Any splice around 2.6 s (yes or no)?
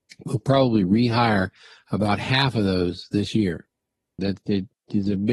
no